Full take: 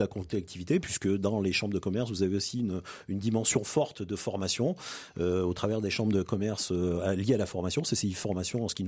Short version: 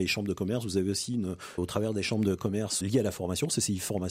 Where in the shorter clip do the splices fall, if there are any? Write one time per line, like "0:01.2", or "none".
0:01.6
0:02.8